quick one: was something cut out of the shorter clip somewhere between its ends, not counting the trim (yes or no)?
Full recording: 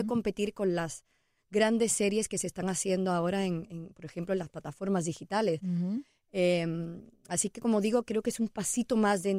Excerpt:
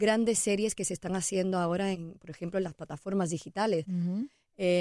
yes